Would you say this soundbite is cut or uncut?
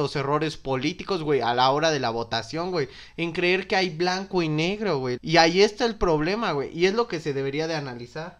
cut